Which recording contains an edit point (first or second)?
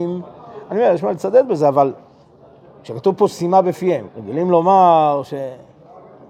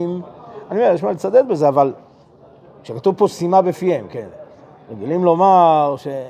first